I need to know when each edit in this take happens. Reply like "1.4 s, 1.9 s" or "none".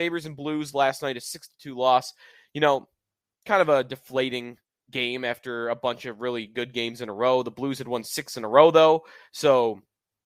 none